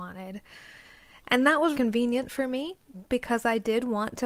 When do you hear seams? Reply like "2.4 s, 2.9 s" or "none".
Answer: 1.7 s